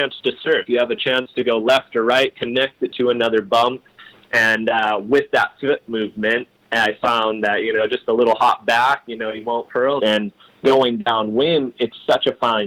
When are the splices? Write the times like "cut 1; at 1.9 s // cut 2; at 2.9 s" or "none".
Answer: cut 1; at 10.0 s